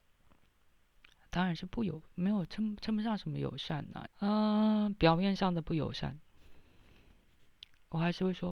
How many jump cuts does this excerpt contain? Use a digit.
2